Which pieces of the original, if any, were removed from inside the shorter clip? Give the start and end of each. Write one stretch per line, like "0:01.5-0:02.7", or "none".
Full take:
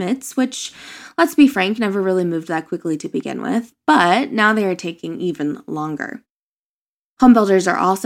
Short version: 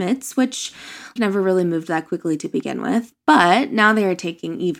0:01.2-0:01.8